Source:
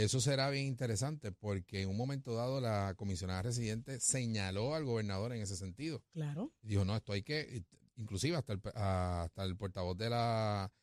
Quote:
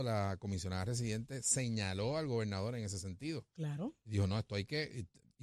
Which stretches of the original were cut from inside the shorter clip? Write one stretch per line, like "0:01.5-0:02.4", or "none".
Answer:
none